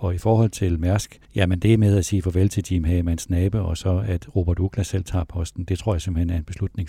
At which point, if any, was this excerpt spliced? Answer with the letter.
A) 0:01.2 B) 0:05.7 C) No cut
A